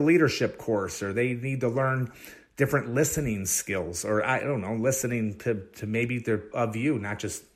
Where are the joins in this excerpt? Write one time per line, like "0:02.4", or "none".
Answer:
0:06.5